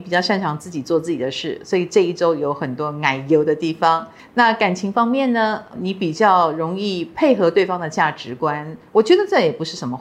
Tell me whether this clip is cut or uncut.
uncut